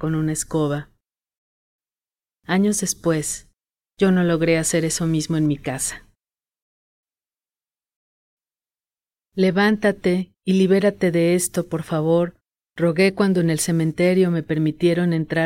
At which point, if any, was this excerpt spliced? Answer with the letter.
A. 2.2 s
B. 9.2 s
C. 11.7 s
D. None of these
D